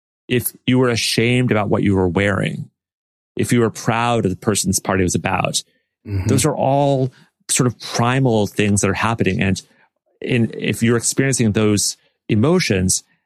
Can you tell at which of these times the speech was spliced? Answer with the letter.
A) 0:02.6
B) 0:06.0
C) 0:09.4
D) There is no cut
B